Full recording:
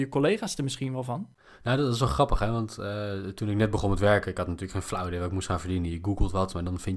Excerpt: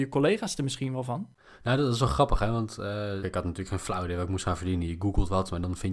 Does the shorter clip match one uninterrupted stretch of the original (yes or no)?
no